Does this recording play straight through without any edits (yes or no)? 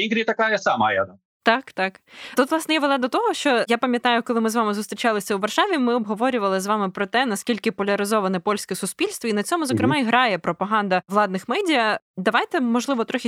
yes